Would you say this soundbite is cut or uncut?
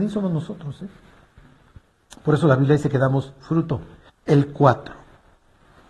cut